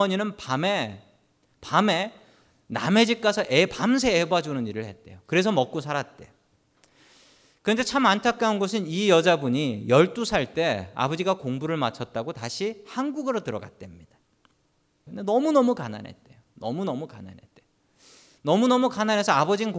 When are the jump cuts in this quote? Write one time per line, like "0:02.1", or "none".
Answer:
0:15.1